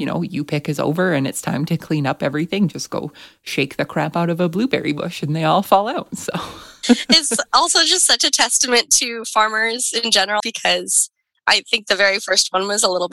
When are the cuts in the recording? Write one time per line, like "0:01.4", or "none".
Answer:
0:10.4